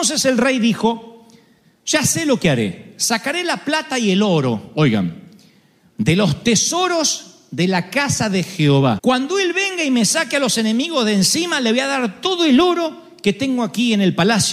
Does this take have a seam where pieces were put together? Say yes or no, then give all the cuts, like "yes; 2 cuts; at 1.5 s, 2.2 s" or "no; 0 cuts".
yes; 1 cut; at 9.0 s